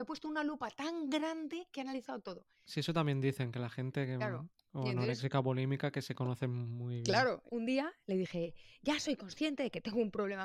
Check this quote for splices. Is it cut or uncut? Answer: cut